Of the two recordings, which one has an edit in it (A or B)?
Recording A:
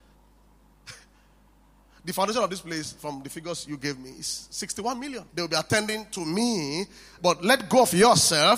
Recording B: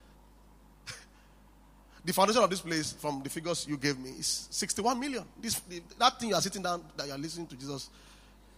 A